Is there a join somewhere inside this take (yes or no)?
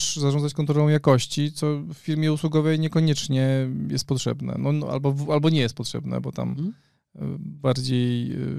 no